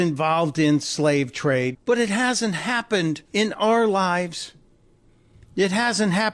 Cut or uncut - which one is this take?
cut